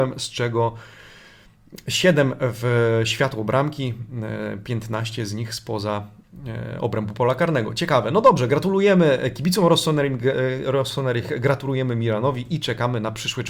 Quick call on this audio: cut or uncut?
uncut